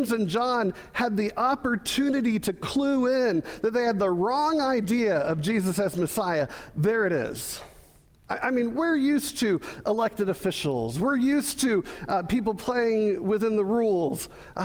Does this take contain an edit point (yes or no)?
no